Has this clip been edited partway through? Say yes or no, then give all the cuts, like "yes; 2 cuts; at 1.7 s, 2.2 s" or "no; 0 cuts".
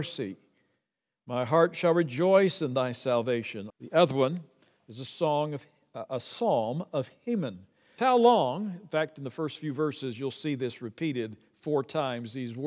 yes; 2 cuts; at 3.7 s, 8.0 s